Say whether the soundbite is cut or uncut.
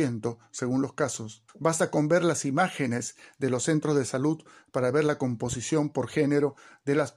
cut